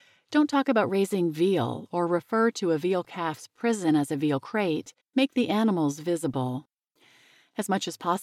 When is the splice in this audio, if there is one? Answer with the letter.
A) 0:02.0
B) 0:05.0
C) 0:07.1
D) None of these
B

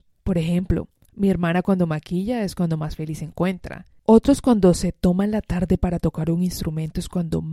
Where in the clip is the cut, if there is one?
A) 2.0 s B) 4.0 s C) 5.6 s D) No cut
B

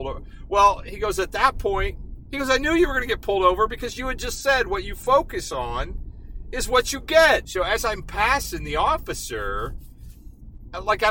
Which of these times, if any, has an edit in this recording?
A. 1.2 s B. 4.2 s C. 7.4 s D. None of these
C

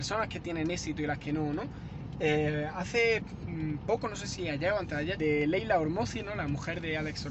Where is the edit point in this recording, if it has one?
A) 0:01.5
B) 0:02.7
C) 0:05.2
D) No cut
C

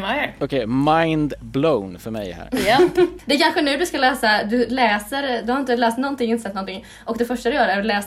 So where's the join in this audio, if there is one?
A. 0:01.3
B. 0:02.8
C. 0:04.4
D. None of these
D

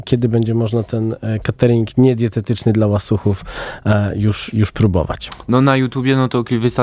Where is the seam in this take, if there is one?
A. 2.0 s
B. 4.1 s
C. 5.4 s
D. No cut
D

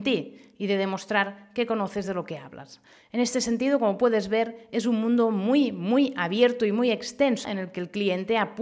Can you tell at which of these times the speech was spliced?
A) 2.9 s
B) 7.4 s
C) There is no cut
B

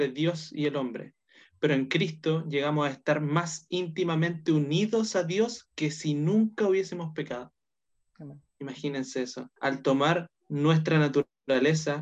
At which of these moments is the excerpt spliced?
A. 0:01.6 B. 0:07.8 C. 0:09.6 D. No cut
C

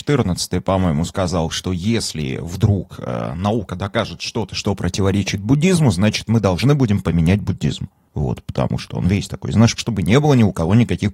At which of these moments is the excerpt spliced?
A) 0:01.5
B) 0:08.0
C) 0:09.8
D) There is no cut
C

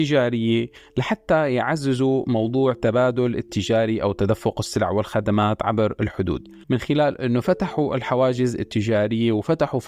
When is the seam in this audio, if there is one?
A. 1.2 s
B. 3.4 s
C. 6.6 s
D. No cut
C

